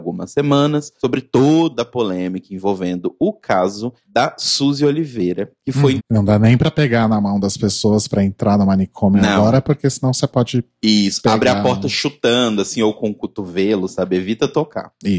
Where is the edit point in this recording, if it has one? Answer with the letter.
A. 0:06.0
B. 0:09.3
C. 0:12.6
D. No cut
A